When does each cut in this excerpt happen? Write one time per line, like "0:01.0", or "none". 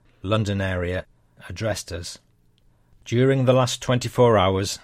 none